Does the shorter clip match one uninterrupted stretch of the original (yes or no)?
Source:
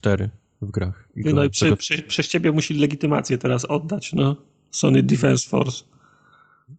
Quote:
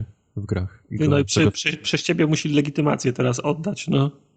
yes